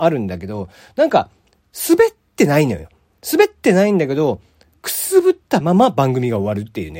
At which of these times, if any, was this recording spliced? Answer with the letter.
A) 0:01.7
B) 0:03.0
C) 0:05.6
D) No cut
D